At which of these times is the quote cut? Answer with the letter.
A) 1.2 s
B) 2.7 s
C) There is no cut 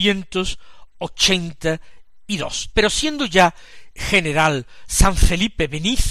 B